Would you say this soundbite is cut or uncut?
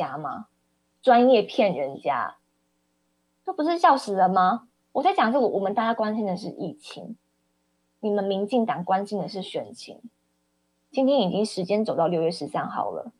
cut